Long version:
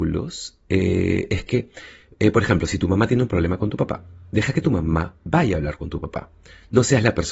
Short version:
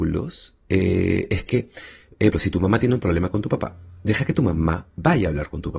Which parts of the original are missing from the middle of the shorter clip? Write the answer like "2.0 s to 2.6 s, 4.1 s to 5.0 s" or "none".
2.3 s to 2.6 s